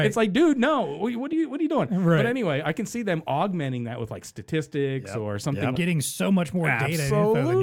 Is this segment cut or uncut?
cut